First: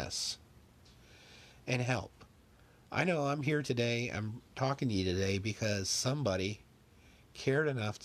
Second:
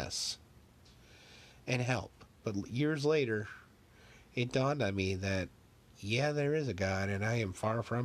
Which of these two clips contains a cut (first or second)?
second